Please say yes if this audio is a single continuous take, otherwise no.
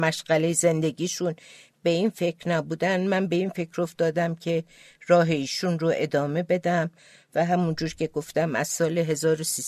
yes